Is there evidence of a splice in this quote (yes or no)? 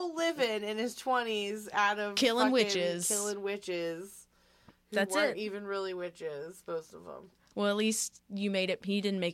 no